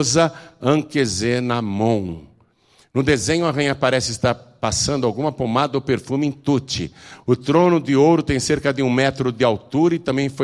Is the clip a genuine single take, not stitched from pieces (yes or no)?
yes